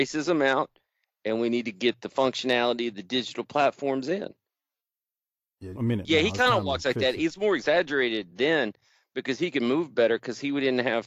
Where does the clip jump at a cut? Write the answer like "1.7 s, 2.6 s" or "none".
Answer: 5.7 s